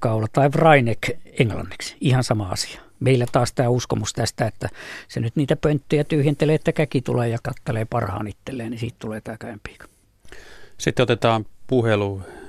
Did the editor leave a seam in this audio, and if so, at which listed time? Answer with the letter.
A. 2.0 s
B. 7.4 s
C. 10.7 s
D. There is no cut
B